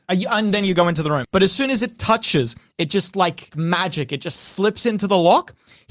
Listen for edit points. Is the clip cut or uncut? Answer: cut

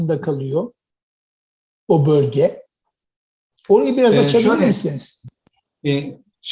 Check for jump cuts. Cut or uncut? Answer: uncut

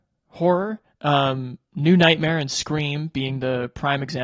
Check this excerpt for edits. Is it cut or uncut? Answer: uncut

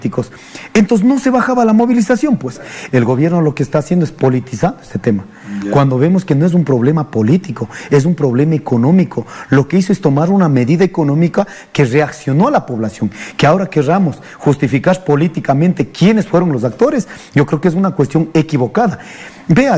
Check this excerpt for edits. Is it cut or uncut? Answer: cut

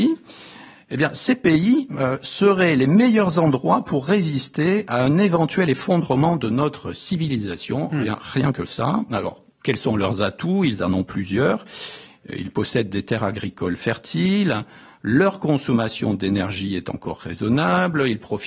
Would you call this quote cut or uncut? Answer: uncut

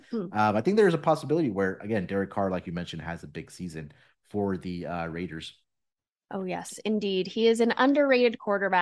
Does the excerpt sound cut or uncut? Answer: uncut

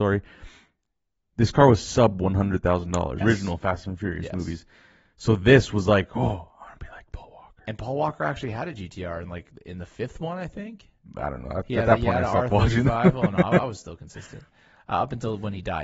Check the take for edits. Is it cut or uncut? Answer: cut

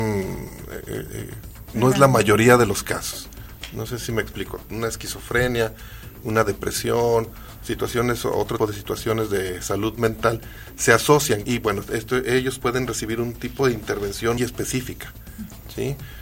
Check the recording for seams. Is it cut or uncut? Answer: cut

